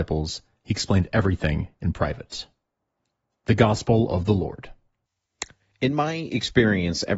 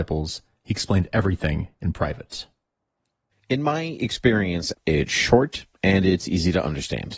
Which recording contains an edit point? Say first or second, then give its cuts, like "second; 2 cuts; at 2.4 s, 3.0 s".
second; 2 cuts; at 3.3 s, 4.7 s